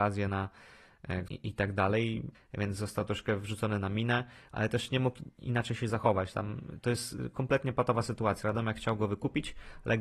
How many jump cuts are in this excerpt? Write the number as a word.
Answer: two